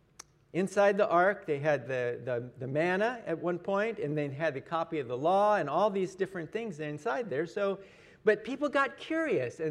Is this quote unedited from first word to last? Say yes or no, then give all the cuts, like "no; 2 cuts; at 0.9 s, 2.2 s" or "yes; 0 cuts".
yes; 0 cuts